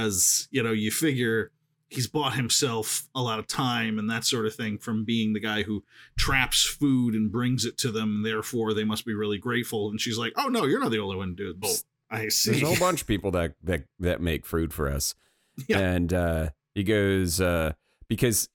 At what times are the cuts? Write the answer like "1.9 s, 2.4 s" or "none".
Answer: 11.6 s